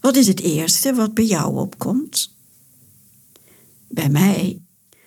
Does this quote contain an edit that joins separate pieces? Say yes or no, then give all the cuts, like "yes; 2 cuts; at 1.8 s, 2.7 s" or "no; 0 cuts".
no; 0 cuts